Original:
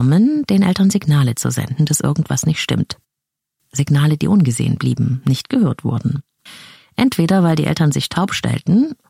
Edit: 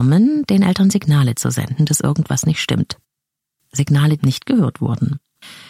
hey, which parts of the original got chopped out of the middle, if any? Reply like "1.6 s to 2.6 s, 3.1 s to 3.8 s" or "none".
4.2 s to 5.2 s